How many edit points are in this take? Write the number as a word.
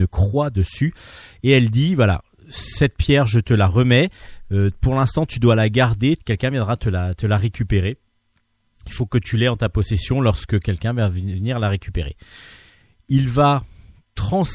one